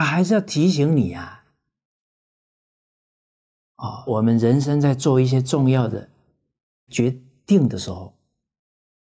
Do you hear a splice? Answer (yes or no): yes